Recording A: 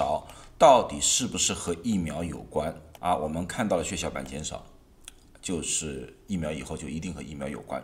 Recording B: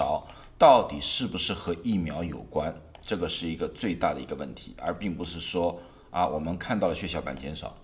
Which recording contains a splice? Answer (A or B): A